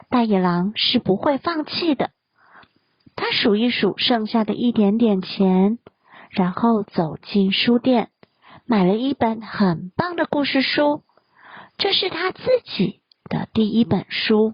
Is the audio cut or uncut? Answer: uncut